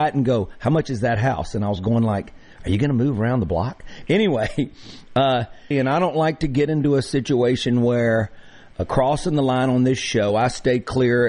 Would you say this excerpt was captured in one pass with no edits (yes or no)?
no